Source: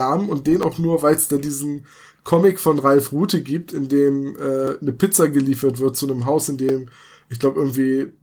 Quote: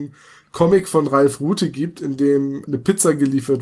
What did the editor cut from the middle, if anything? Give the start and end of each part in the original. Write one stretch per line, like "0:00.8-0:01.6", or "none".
0:04.4-0:04.8